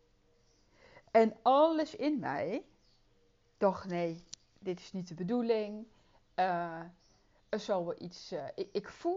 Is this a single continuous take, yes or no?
yes